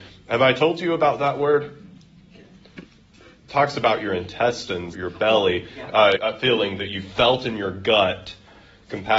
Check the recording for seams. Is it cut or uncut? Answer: cut